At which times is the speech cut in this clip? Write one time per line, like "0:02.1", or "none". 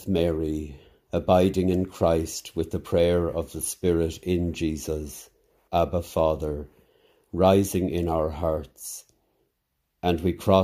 0:05.7